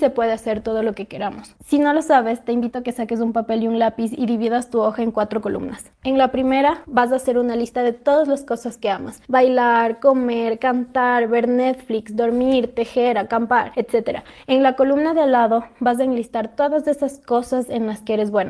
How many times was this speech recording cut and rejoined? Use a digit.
2